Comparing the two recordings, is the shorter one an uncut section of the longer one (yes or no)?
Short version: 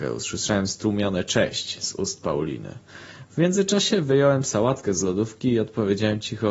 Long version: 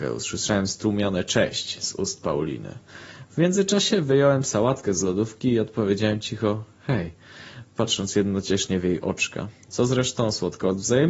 yes